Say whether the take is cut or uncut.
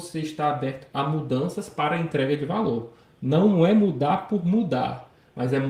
uncut